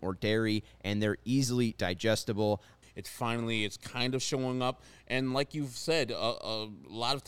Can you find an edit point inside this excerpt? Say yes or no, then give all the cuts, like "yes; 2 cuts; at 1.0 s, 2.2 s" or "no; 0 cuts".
yes; 1 cut; at 2.8 s